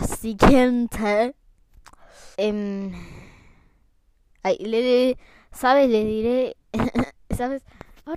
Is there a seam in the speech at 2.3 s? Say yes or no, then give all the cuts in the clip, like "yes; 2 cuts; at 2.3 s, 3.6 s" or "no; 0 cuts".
yes; 1 cut; at 2.3 s